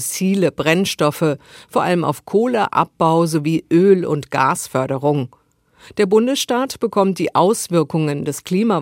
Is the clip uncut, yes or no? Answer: yes